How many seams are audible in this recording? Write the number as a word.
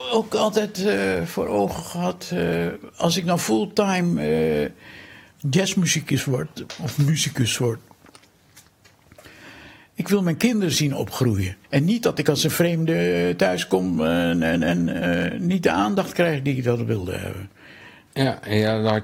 two